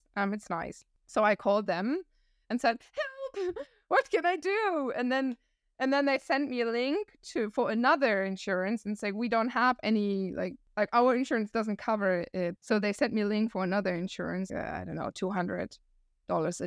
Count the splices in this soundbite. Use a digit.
2